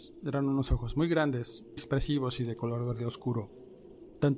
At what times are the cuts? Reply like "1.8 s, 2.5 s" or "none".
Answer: 1.8 s